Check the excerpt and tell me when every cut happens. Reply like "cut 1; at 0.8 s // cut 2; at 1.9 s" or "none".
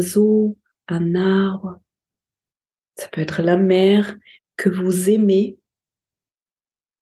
cut 1; at 2.8 s // cut 2; at 4.4 s

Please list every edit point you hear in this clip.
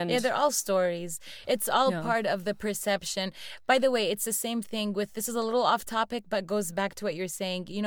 none

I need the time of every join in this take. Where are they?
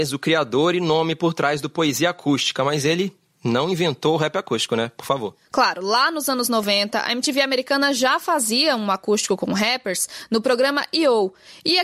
none

